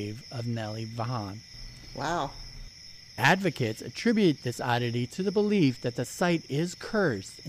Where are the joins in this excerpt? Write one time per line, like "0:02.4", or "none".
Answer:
none